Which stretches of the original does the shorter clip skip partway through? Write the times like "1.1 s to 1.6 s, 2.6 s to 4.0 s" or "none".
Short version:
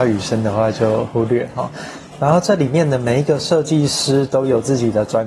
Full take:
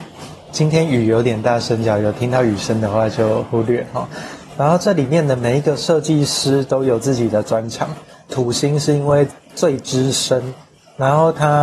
none